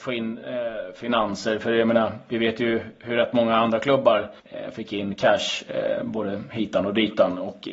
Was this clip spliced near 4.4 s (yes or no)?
yes